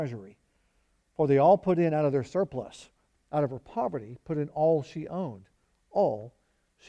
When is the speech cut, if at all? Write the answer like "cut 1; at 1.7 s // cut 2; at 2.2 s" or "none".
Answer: cut 1; at 3.1 s